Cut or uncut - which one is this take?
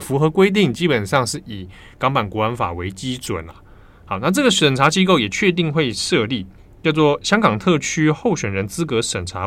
uncut